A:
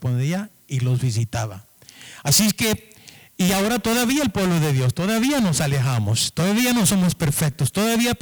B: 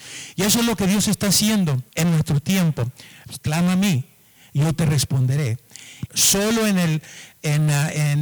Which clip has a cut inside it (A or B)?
B